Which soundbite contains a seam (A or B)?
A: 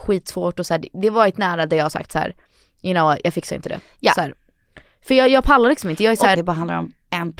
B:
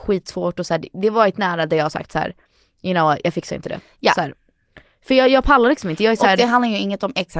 A